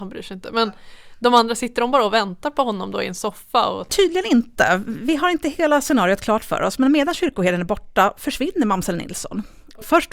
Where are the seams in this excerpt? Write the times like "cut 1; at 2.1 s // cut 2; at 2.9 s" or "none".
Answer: none